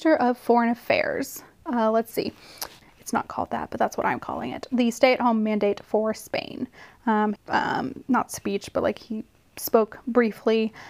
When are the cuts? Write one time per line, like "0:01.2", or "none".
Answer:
0:01.7
0:02.8
0:07.4